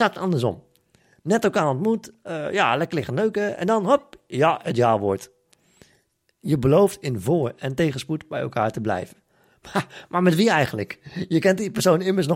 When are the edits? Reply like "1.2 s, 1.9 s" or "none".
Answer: none